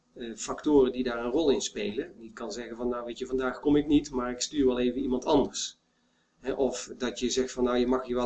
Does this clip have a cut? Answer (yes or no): yes